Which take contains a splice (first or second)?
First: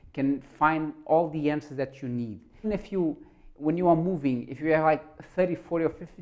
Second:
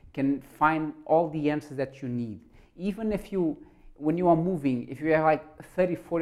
first